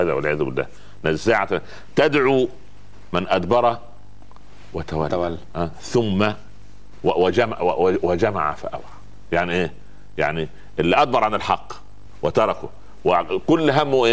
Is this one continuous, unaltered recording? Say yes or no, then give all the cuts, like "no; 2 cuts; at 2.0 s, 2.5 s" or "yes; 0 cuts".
yes; 0 cuts